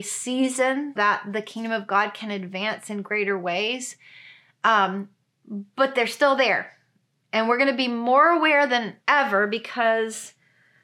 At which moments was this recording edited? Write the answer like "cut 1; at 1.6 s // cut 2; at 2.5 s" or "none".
cut 1; at 1.0 s